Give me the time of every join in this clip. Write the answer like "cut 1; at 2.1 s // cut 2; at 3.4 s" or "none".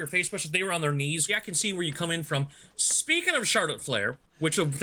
cut 1; at 1.3 s